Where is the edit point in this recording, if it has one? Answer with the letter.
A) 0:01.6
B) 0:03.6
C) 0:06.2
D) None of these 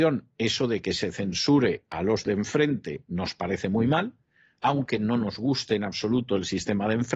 D